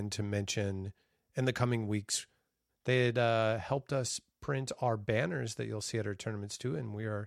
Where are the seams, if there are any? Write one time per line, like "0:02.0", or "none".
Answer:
0:02.7